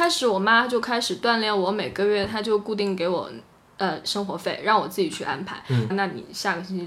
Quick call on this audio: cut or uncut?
cut